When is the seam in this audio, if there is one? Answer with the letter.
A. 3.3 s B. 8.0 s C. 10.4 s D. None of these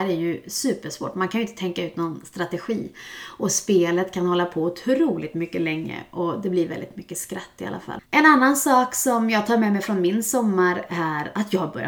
B